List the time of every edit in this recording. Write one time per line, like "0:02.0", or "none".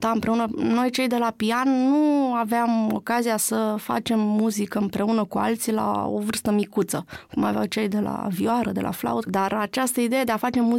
0:09.3